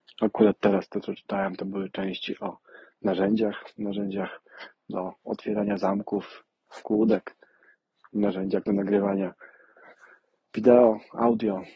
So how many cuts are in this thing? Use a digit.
0